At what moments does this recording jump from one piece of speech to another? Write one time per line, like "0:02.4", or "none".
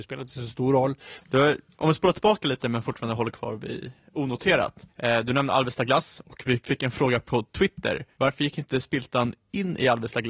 0:01.2